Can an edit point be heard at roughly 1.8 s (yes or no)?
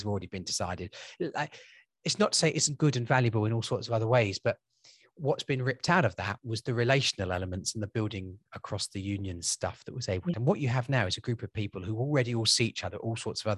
no